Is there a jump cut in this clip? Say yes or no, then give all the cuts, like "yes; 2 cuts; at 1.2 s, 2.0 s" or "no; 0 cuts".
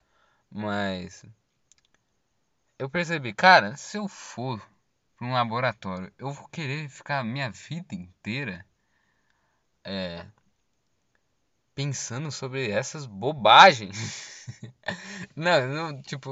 no; 0 cuts